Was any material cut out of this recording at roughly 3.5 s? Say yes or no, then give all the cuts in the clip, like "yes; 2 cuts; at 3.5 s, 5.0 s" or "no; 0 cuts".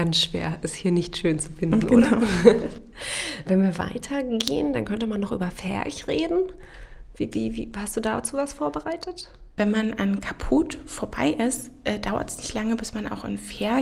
yes; 1 cut; at 3.5 s